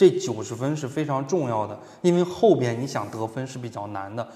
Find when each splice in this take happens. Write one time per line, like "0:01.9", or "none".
none